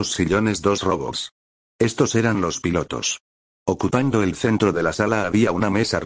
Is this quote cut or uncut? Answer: uncut